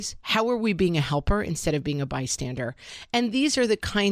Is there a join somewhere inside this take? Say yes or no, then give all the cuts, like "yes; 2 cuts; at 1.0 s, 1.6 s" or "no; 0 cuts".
no; 0 cuts